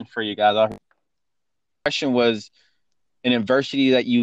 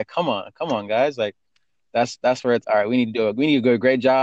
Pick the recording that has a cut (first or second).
second